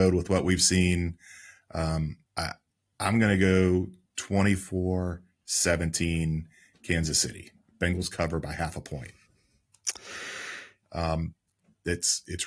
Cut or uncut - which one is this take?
cut